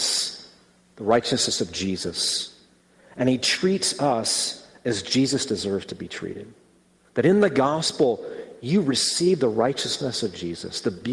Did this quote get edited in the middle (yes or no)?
yes